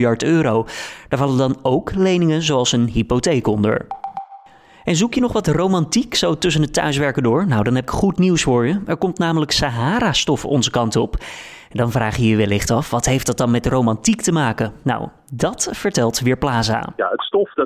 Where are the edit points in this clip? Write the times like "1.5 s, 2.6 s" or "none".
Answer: none